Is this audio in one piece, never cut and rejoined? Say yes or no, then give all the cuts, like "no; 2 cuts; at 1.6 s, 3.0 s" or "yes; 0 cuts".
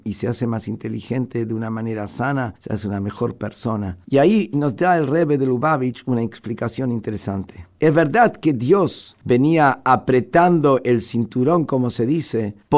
no; 1 cut; at 4.0 s